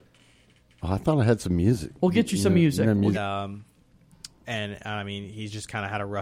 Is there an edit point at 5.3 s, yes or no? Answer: no